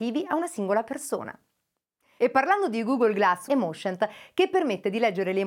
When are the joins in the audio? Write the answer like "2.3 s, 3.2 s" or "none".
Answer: 2.2 s, 3.5 s